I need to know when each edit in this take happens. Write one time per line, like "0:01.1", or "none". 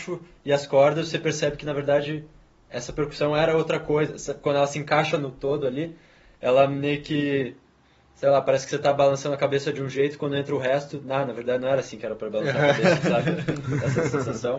none